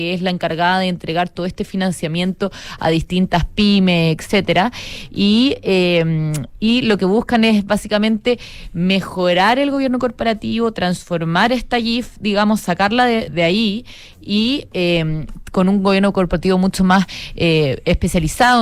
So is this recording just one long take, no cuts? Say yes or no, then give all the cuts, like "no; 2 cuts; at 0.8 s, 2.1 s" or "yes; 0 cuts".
no; 1 cut; at 13.3 s